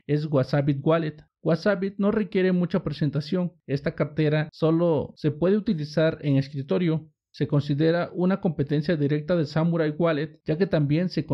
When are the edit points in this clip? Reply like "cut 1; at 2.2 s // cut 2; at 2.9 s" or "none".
none